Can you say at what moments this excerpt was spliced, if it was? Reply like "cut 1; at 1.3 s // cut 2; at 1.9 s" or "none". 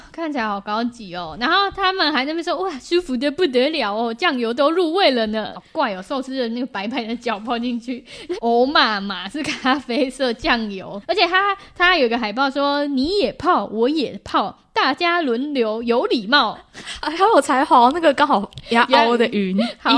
cut 1; at 5.5 s // cut 2; at 8.4 s